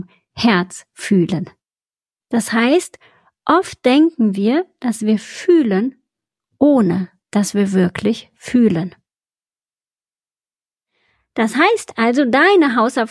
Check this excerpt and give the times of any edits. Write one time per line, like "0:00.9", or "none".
0:02.2